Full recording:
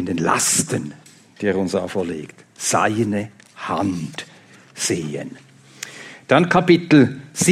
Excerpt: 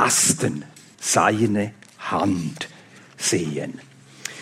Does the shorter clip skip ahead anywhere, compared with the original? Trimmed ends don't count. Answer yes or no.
yes